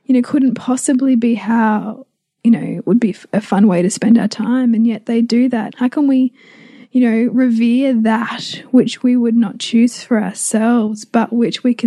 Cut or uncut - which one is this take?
cut